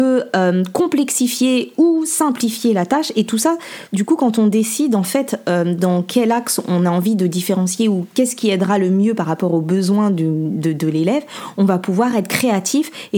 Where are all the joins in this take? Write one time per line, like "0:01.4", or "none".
none

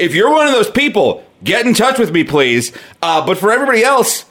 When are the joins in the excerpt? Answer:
none

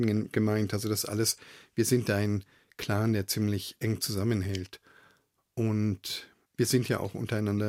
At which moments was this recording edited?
none

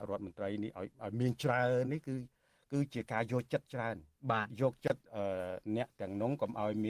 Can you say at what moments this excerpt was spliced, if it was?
0:01.8

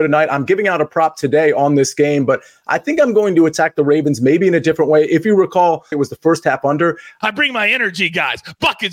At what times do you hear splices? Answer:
0:05.9
0:07.2

